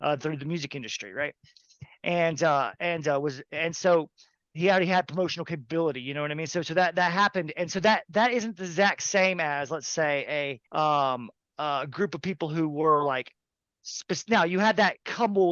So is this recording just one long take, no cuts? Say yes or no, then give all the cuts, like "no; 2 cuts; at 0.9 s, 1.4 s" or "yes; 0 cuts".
no; 1 cut; at 10.7 s